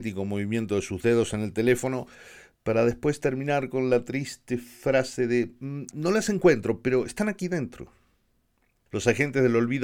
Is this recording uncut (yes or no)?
no